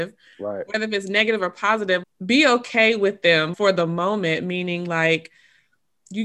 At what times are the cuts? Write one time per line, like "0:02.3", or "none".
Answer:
0:02.0
0:03.5